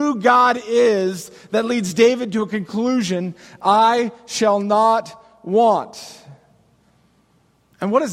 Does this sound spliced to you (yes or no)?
no